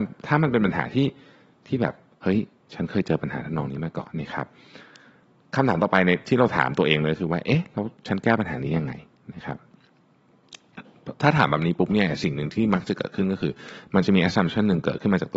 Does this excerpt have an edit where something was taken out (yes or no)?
yes